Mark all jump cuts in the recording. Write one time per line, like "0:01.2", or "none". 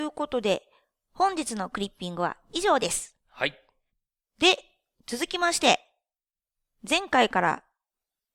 none